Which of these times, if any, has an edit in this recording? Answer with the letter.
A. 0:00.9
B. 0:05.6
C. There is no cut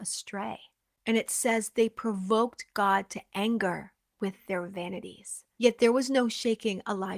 B